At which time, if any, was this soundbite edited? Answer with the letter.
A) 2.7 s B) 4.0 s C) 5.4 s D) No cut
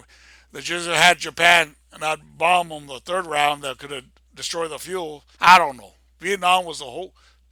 C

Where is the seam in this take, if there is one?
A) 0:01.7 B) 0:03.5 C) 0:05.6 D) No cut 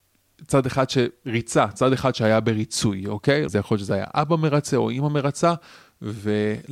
B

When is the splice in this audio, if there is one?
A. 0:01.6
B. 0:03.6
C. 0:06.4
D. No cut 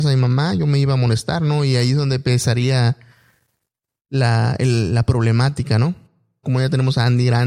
C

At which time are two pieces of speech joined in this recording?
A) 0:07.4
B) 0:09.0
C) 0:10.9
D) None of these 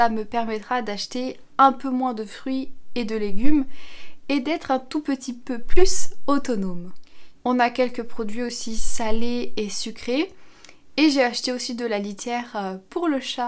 A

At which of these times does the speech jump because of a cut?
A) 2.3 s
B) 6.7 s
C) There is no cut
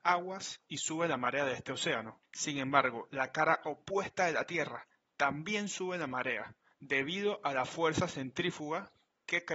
B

